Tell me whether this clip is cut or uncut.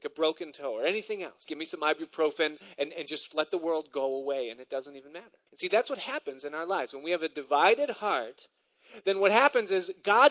cut